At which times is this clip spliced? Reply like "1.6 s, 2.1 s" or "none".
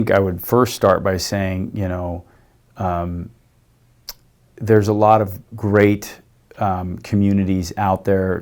none